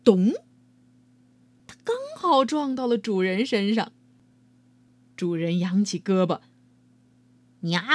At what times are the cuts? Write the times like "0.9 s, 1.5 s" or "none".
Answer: none